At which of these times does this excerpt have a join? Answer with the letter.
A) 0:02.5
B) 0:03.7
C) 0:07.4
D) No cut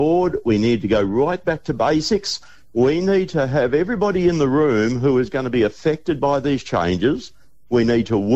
D